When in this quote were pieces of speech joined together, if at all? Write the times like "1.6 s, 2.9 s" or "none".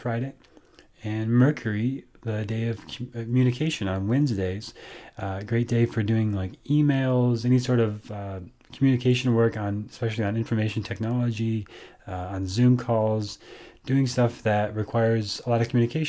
none